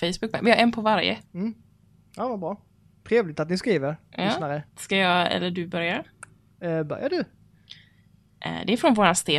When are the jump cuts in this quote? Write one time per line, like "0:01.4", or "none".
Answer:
0:01.3
0:04.7